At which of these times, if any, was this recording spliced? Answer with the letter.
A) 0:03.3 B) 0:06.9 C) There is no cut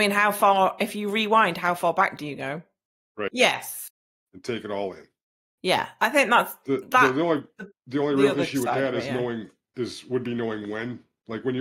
A